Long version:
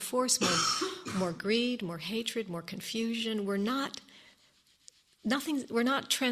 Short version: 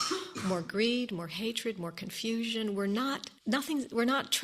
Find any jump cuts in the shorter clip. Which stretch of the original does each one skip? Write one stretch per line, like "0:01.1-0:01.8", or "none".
0:04.1-0:05.1